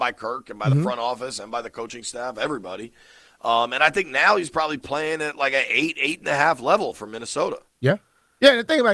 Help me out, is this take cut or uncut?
uncut